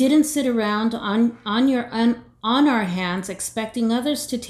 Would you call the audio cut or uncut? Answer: uncut